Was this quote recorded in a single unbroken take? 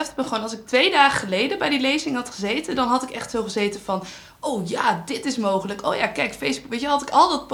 yes; 0 cuts

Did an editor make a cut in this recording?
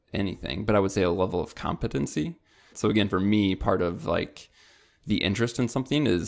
yes; 1 cut; at 2.7 s

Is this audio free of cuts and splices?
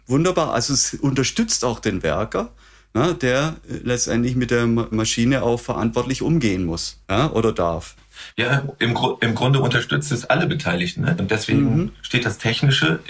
no; 3 cuts; at 4.9 s, 7.0 s, 11.2 s

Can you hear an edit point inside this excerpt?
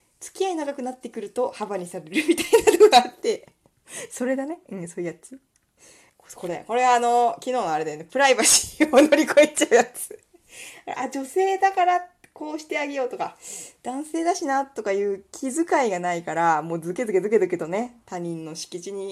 yes; 1 cut; at 6.1 s

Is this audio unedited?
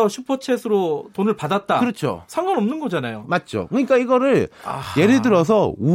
yes; 0 cuts

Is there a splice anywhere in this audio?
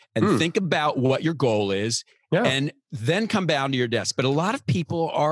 no; 0 cuts

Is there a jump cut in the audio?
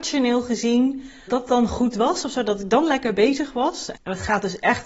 yes; 2 cuts; at 1.3 s, 3.9 s

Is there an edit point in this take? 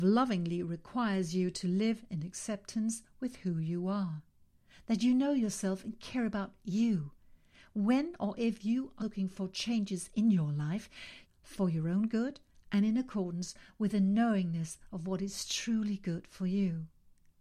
yes; 2 cuts; at 9.0 s, 11.2 s

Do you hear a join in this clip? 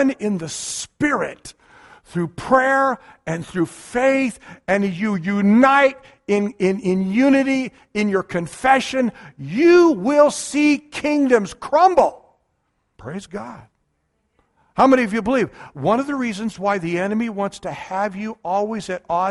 yes; 1 cut; at 13.0 s

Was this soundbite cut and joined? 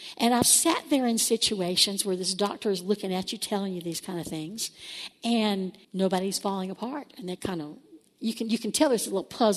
yes; 1 cut; at 5.8 s

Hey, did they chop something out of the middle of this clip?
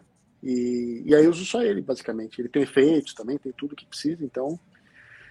no; 0 cuts

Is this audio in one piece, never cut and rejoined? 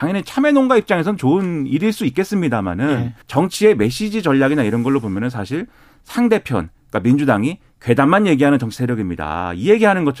no; 1 cut; at 3.2 s

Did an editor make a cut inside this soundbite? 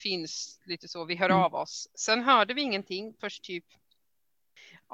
no; 0 cuts

